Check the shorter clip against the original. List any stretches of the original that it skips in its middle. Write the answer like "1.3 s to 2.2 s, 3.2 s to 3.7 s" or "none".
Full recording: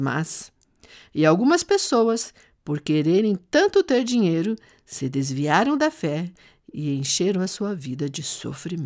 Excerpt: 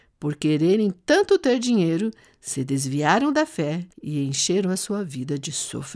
6.4 s to 6.6 s

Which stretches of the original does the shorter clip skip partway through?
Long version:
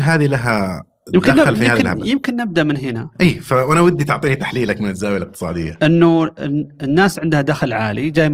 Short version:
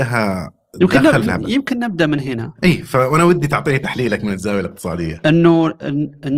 1.6 s to 1.8 s

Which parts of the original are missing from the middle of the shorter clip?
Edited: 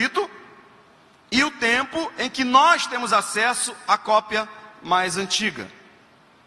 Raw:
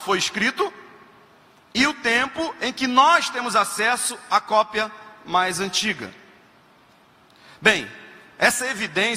none

